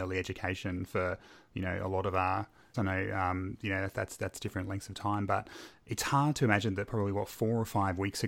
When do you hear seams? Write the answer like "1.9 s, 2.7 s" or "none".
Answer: 2.7 s